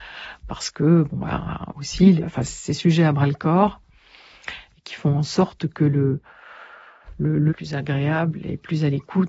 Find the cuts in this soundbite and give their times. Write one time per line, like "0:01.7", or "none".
0:02.2
0:07.5